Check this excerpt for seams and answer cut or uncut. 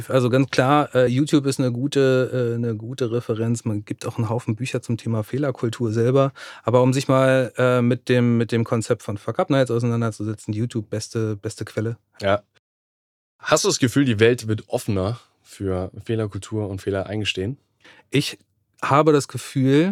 uncut